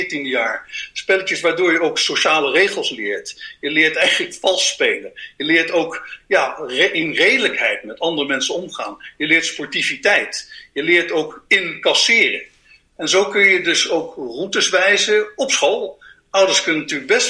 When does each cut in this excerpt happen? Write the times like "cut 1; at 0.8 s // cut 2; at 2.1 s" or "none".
none